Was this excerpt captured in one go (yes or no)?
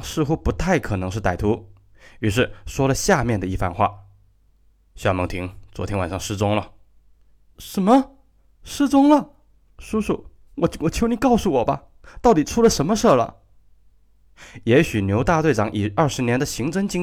no